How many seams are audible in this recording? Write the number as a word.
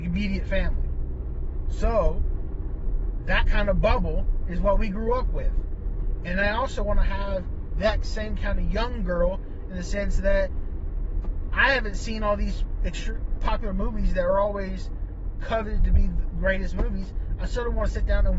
one